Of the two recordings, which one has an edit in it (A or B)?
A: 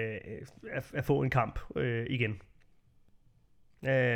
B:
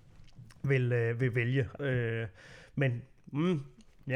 B